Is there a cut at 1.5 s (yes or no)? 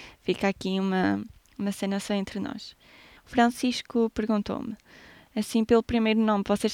no